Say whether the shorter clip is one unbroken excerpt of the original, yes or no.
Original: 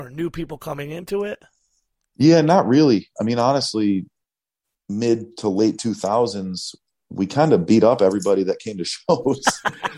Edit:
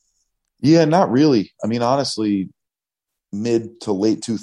yes